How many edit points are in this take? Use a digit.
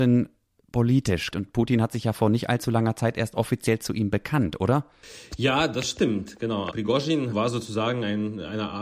1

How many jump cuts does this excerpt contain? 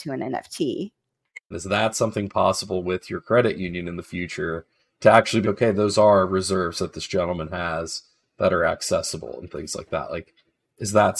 2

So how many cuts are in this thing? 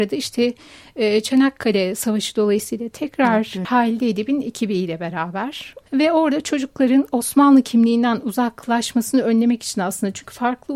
2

